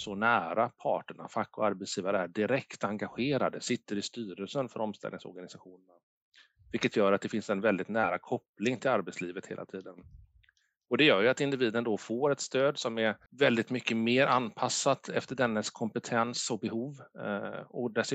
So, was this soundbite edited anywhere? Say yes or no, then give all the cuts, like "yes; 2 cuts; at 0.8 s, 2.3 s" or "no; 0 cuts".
yes; 1 cut; at 13.3 s